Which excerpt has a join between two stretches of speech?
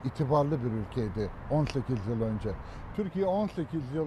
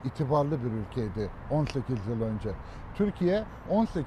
first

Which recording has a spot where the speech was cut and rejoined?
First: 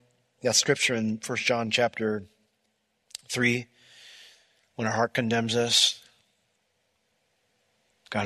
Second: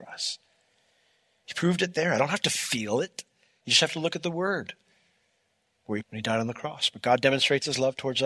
second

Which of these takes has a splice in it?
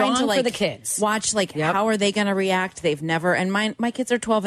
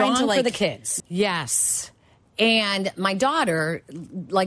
second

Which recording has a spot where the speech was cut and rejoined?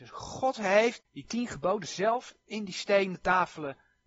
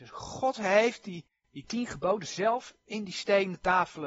first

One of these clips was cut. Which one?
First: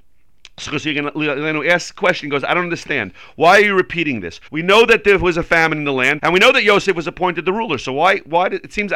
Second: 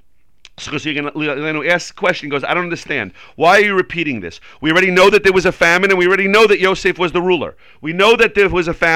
first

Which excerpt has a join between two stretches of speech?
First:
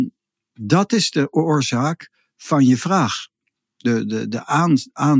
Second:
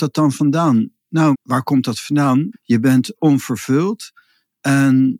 second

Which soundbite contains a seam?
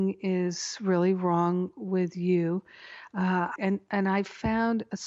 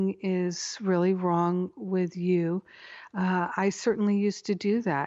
first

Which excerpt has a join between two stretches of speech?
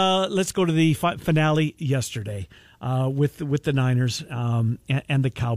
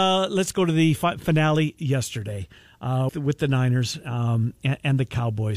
second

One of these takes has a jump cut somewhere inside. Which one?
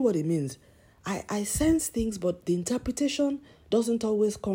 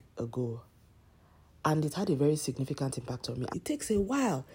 second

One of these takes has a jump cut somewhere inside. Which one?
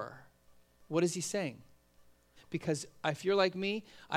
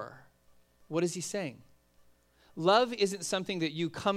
first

